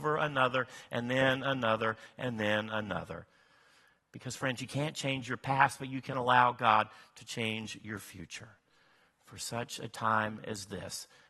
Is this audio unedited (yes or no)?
yes